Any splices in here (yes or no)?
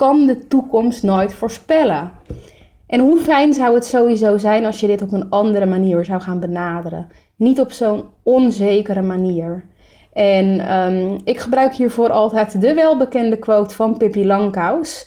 no